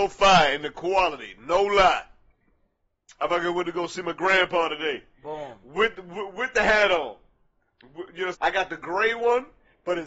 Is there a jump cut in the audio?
yes; 1 cut; at 8.3 s

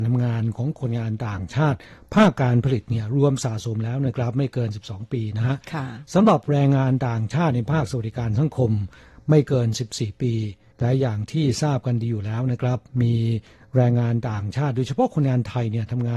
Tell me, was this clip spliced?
no; 0 cuts

